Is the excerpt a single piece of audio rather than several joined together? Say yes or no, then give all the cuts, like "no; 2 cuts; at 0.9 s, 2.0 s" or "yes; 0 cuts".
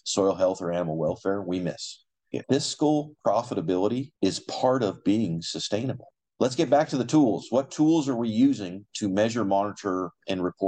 no; 2 cuts; at 2.4 s, 6.3 s